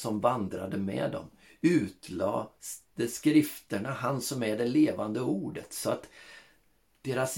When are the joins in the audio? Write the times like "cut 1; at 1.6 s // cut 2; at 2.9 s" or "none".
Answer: none